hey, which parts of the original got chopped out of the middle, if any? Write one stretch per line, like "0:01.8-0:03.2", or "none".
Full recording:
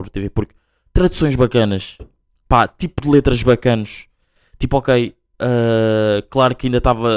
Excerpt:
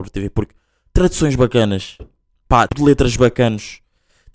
0:02.7-0:02.9